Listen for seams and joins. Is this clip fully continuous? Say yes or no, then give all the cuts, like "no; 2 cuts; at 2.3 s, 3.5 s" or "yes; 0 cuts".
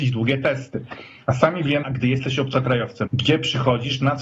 no; 2 cuts; at 1.8 s, 3.1 s